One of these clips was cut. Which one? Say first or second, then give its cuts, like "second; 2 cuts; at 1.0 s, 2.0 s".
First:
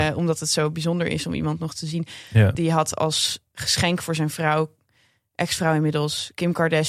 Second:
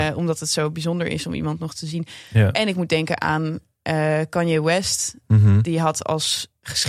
first; 1 cut; at 2.5 s